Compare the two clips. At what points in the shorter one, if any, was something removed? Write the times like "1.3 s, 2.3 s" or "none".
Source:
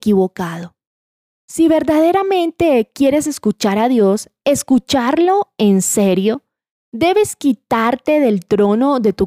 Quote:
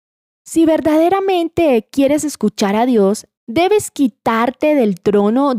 3.4 s